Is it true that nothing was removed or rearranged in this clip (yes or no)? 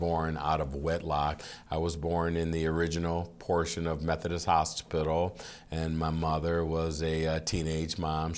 yes